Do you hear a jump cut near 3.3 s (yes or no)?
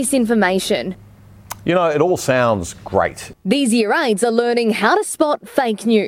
yes